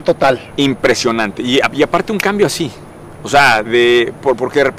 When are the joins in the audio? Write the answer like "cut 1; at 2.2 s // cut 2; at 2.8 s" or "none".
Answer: cut 1; at 3.6 s